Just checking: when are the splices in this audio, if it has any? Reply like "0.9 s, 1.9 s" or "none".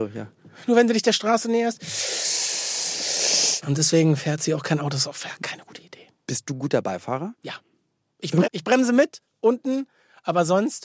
3.6 s, 8.4 s